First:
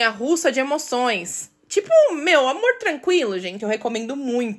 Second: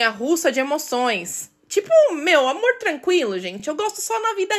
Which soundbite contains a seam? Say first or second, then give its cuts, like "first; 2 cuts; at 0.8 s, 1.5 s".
first; 1 cut; at 3.6 s